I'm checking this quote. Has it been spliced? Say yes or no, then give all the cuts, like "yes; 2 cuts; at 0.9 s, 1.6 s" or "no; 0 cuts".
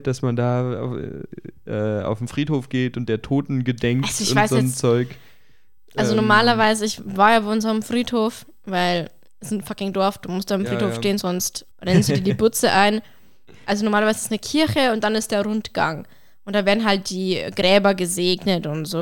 yes; 1 cut; at 11.7 s